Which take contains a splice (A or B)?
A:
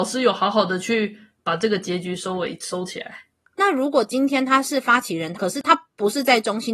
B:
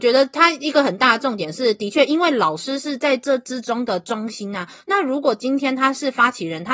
A